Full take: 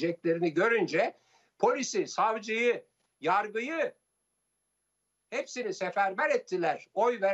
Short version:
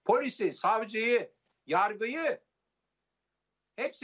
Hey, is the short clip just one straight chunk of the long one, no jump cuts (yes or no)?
yes